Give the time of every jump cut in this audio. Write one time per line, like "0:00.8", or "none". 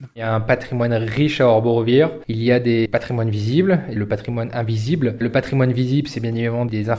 none